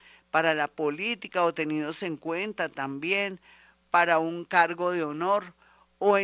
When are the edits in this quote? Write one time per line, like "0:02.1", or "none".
0:04.5